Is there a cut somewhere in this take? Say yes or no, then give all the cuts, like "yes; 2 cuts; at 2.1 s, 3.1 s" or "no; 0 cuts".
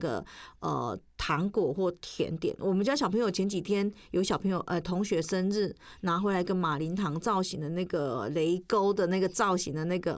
yes; 1 cut; at 1.1 s